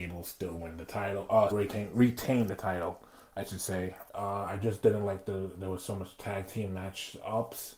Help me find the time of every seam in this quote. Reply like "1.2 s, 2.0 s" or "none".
1.5 s, 4.1 s